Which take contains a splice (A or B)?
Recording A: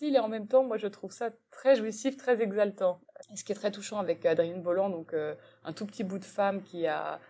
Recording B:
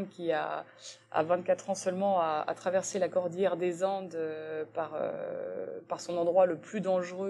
A